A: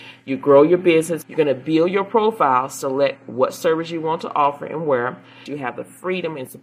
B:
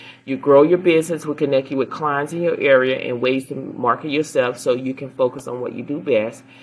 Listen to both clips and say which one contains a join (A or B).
A